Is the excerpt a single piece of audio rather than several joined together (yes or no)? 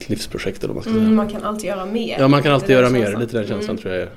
yes